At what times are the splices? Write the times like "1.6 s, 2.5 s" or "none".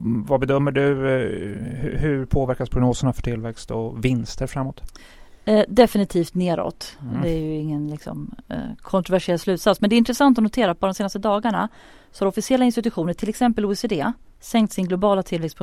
none